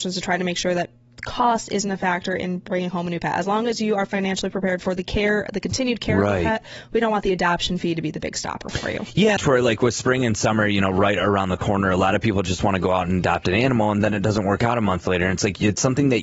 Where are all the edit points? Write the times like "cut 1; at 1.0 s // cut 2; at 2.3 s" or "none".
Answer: cut 1; at 9.4 s